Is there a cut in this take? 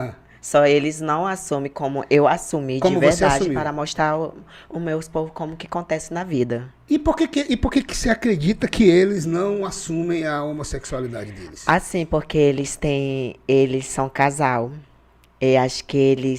no; 0 cuts

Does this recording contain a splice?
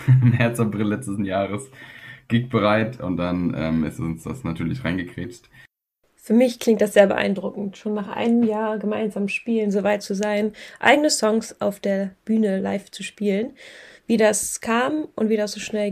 no; 0 cuts

